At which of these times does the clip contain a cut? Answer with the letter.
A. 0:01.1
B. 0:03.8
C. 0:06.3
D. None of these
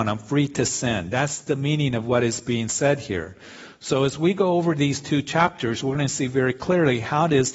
D